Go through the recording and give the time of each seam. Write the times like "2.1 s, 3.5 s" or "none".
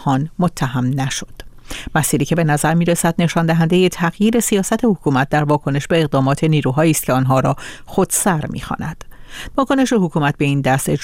9.5 s